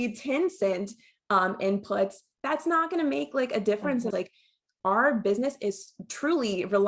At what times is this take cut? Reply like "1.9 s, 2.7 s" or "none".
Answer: 4.1 s